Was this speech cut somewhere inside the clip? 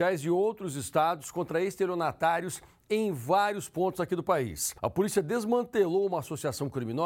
yes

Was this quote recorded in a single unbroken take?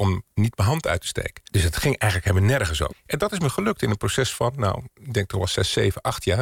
no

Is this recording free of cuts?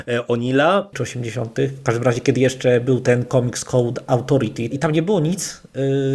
no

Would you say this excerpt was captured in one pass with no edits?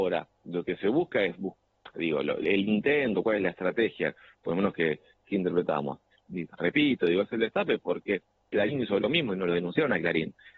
no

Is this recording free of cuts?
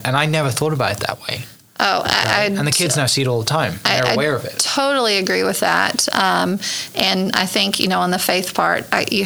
yes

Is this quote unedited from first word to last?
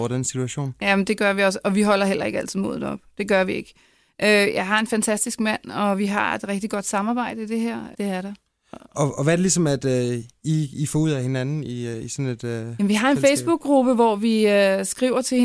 no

